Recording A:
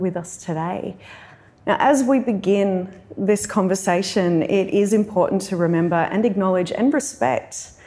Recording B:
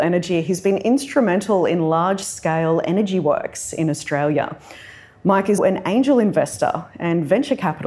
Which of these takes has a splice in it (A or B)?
B